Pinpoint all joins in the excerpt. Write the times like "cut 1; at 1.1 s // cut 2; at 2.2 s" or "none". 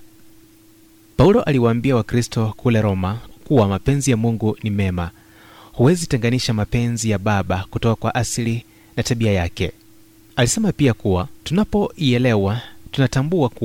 cut 1; at 11.4 s